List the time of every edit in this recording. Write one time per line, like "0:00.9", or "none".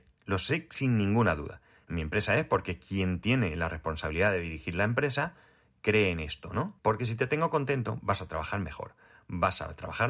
0:06.8